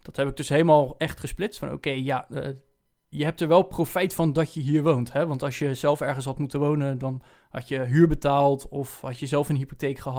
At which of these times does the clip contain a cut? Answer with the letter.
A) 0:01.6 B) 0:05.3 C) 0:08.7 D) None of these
A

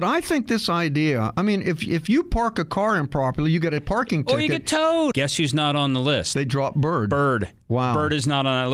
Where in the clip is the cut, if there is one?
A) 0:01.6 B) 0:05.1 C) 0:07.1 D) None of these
B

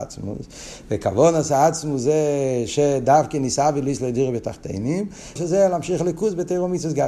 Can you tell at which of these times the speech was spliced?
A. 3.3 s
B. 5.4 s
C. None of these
B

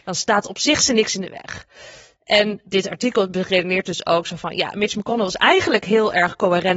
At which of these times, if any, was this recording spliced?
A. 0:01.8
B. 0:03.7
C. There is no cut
C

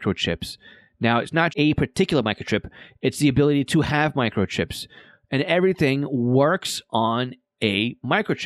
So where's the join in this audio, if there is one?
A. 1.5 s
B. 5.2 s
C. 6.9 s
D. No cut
A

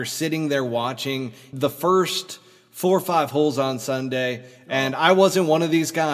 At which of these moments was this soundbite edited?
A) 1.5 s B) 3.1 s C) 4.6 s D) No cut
A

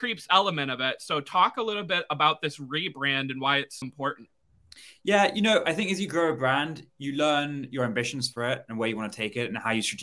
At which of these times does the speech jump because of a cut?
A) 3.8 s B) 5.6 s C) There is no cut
A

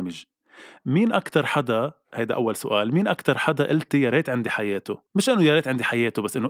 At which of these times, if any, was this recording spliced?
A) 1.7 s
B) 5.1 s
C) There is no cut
B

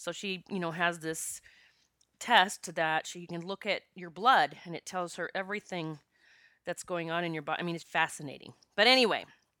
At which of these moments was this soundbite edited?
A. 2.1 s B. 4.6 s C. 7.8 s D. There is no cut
C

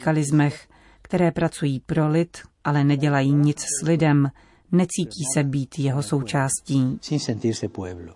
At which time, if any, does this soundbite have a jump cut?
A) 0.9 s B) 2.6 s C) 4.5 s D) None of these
D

